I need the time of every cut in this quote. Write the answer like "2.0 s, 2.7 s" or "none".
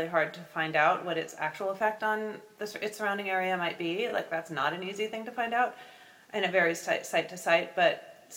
none